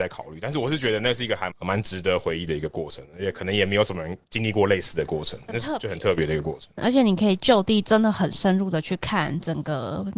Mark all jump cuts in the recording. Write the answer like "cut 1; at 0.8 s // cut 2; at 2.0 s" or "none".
cut 1; at 1.5 s